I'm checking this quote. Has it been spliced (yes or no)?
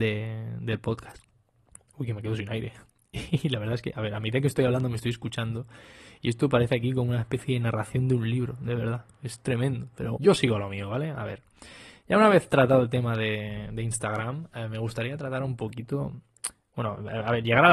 yes